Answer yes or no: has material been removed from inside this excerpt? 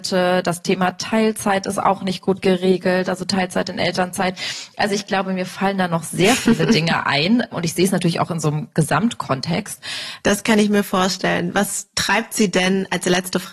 yes